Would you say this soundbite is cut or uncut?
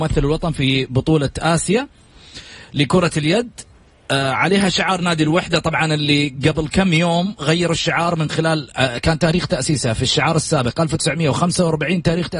uncut